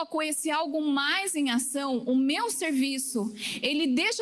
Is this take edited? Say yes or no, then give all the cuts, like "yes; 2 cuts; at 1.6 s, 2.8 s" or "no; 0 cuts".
no; 0 cuts